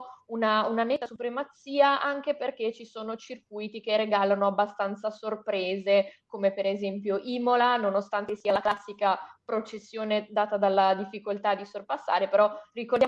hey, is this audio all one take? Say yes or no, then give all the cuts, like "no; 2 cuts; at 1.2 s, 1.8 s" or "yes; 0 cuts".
yes; 0 cuts